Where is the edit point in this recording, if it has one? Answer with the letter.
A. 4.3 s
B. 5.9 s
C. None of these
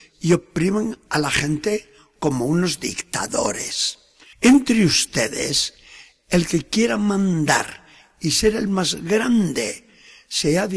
A